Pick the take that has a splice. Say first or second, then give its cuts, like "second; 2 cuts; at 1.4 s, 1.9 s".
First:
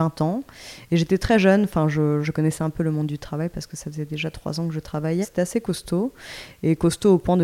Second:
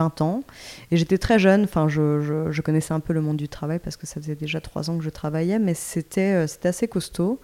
first; 2 cuts; at 2.2 s, 5.2 s